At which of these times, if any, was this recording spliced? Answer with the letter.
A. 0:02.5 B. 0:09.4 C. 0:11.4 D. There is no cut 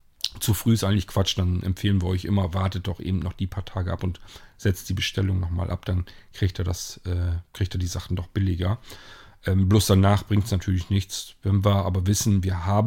D